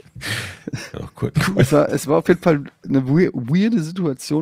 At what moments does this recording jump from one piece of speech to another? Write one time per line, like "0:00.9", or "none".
0:01.3